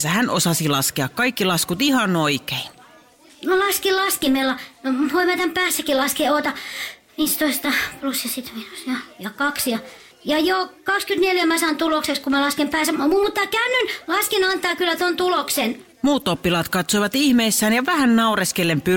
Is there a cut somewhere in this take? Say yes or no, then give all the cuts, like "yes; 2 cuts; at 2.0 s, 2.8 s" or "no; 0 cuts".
yes; 2 cuts; at 10.1 s, 15.9 s